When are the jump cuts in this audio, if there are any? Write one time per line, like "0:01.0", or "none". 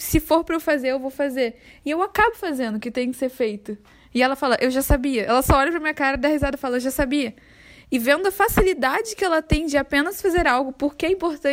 none